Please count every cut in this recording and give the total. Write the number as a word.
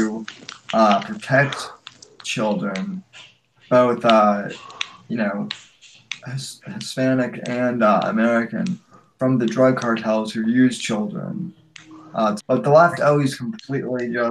one